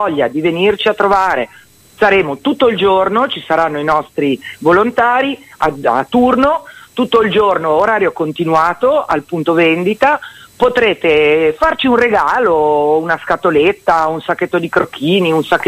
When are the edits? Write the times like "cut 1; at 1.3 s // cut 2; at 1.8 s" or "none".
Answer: none